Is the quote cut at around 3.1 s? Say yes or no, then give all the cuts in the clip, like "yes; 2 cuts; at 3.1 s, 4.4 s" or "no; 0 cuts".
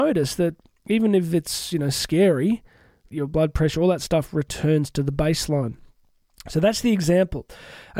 yes; 1 cut; at 3.1 s